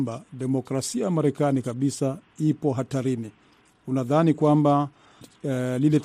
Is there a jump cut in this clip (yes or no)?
no